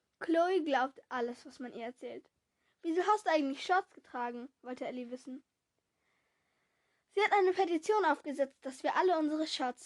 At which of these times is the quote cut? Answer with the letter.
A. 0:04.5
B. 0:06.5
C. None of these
C